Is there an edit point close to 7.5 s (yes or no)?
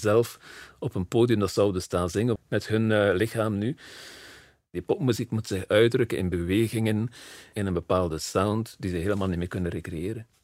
yes